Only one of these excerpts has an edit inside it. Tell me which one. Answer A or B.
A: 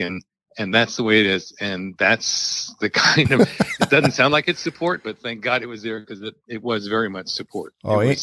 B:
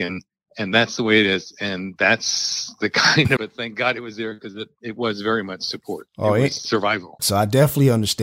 B